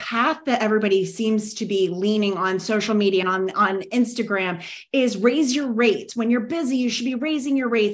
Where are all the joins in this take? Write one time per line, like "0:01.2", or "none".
0:03.2